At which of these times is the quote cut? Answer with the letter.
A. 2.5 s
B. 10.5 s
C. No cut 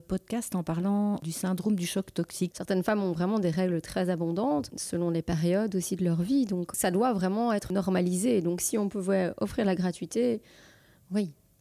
A